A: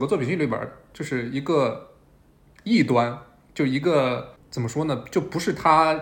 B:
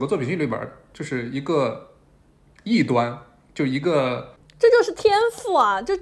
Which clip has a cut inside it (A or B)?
B